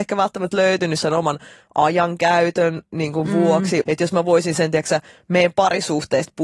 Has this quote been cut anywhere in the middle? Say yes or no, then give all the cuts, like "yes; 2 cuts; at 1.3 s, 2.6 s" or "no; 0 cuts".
yes; 1 cut; at 3.8 s